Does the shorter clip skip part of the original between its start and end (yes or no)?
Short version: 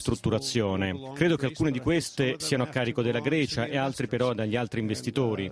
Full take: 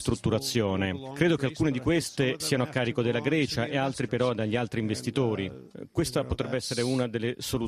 no